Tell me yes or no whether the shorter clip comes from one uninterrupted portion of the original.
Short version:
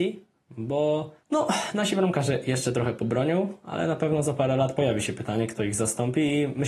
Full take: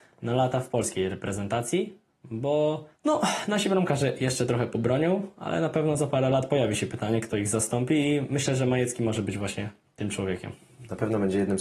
yes